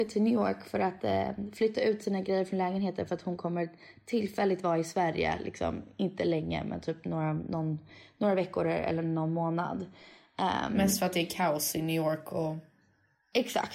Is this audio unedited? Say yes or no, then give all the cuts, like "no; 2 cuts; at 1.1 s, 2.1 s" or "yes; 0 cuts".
yes; 0 cuts